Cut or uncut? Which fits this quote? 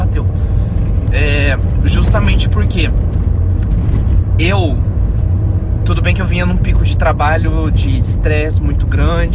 cut